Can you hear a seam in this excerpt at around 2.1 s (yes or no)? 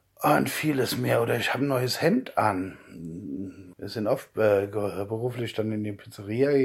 no